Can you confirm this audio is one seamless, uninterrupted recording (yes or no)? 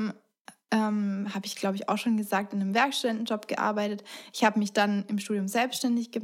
yes